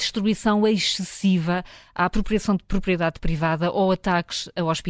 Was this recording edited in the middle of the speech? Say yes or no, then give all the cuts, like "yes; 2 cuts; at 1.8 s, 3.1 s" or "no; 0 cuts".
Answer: no; 0 cuts